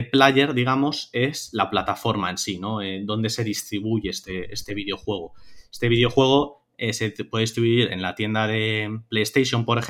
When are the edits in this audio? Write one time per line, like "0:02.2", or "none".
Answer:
none